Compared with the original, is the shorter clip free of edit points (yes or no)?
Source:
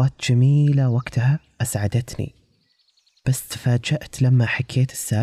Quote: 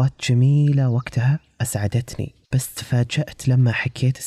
no